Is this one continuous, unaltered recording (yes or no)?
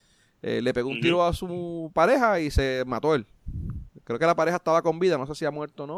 yes